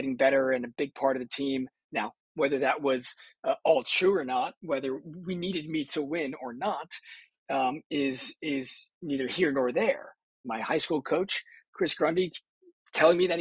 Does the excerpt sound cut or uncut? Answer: cut